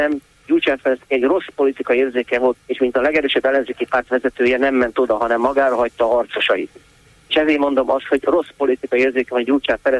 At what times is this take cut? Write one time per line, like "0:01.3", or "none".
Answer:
0:02.5